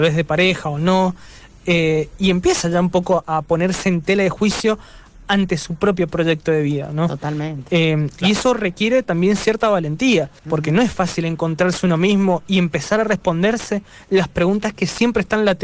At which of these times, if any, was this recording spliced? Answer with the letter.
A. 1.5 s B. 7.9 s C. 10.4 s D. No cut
C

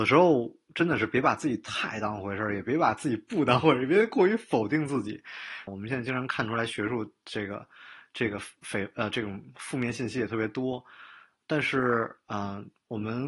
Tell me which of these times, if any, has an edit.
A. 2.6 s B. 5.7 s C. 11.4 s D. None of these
B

